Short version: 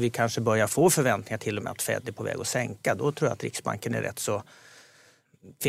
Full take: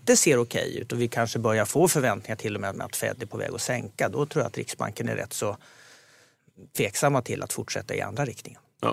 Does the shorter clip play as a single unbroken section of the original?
no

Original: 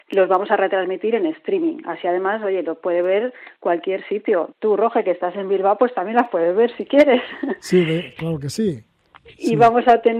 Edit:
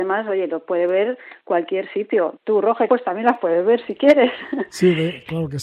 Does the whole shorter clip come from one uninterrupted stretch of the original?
no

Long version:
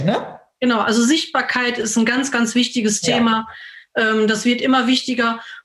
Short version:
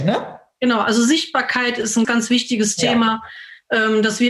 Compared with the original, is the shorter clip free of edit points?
no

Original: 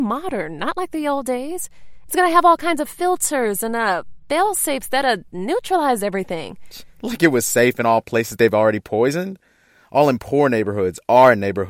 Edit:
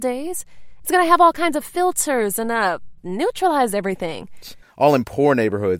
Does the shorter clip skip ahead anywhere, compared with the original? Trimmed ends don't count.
yes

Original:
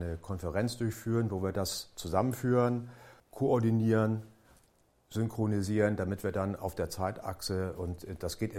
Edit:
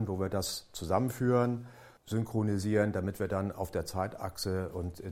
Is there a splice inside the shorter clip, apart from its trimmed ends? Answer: yes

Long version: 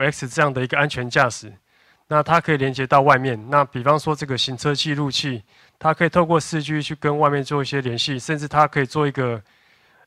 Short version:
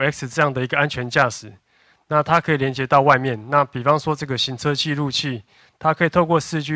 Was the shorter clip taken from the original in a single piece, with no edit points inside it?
yes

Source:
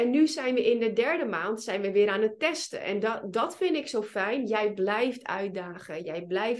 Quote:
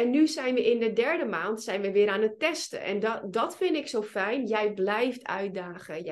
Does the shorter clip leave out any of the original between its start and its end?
no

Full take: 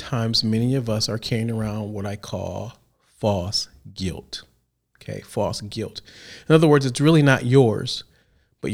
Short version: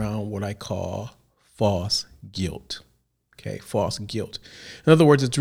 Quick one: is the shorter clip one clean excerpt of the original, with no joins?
yes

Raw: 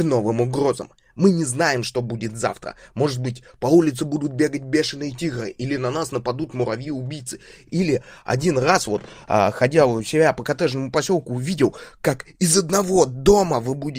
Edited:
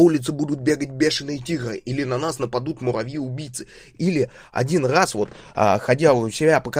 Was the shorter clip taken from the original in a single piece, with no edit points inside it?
yes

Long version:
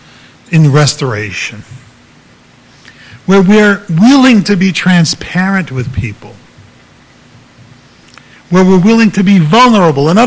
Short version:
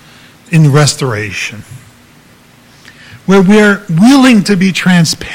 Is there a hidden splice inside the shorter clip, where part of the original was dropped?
no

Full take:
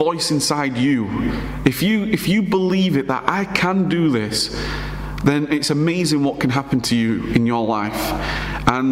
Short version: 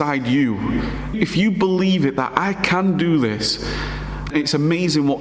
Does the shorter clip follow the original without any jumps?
no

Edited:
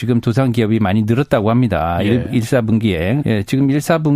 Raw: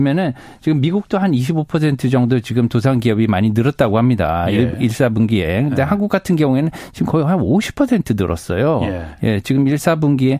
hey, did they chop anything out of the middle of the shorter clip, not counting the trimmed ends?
yes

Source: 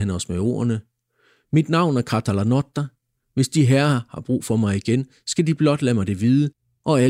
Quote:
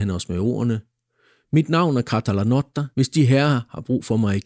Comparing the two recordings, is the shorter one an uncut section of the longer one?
no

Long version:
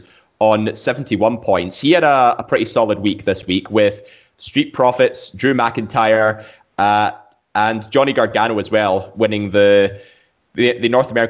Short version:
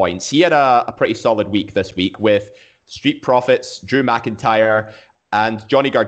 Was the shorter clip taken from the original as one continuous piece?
no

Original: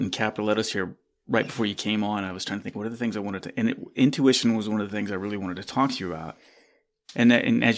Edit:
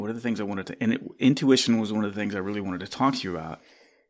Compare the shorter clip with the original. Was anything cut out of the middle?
no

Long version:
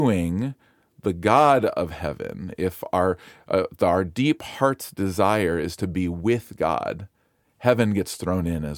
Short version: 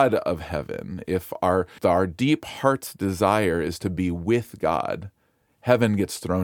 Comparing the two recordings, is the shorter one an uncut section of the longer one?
no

